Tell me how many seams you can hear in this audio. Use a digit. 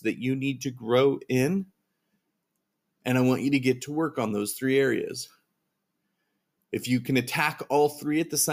0